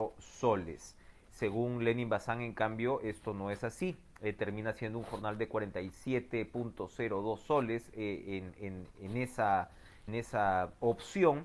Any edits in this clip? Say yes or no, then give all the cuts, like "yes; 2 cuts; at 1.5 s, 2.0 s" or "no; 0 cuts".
yes; 2 cuts; at 8.9 s, 10.1 s